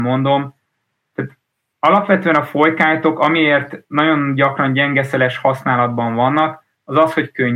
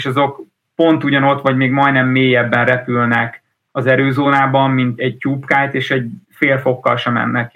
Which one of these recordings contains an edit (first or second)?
second